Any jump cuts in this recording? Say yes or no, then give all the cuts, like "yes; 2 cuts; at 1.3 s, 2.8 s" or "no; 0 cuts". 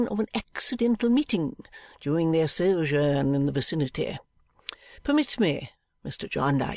no; 0 cuts